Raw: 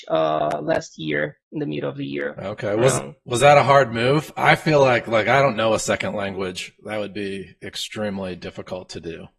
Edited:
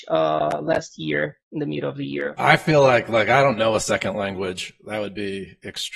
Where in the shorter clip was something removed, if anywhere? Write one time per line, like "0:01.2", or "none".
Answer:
0:02.4

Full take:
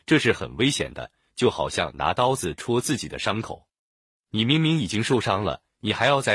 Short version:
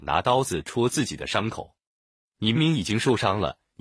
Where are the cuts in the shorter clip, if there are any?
0:02.5

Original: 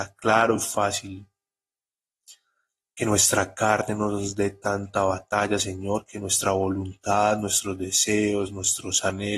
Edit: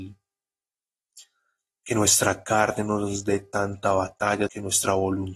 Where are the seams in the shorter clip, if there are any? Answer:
0:04.5

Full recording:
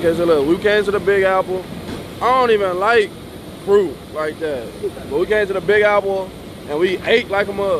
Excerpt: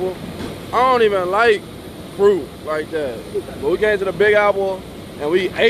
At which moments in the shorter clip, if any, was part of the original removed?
none

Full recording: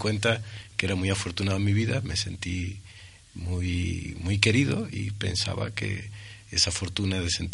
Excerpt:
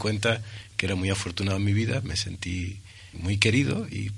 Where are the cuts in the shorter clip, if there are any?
0:03.1

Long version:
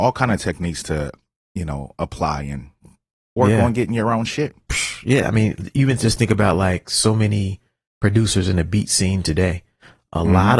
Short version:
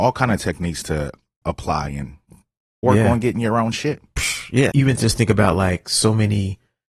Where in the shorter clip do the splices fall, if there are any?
0:01.4
0:04.7

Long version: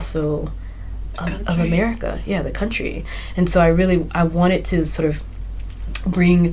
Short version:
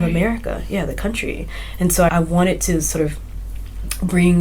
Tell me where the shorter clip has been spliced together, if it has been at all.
0:02.1

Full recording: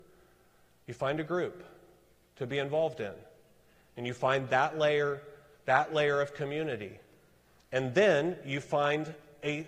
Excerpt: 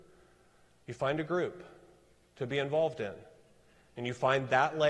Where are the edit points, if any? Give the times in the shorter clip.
none

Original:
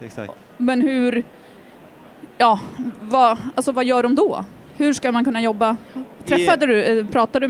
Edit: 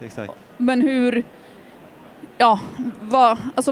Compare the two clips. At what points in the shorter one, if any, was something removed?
none

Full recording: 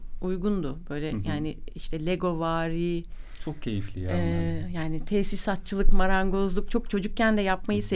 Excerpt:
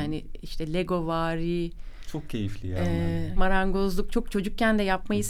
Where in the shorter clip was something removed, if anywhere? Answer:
0:03.4

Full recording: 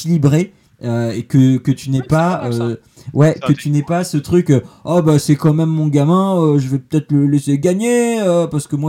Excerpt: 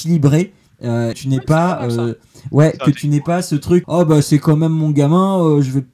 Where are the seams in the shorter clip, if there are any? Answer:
0:01.1
0:03.8

